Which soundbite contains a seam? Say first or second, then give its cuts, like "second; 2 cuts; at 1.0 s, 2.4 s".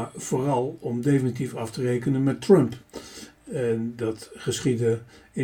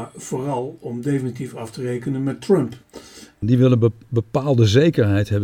second; 1 cut; at 3.4 s